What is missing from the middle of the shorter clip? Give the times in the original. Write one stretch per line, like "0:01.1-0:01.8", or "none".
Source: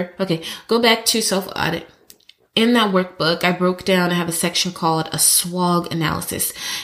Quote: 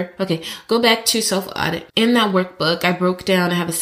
0:01.9-0:02.5